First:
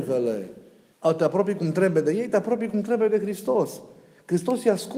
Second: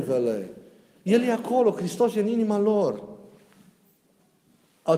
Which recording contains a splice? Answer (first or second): first